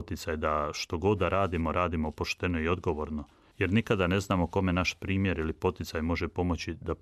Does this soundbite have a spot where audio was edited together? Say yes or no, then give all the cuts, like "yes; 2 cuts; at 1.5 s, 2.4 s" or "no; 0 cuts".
no; 0 cuts